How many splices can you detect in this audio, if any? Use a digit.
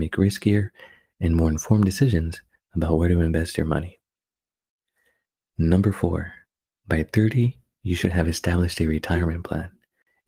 0